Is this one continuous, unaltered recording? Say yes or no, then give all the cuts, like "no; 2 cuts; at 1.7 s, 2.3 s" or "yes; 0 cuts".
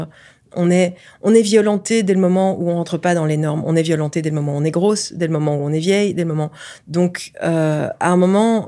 yes; 0 cuts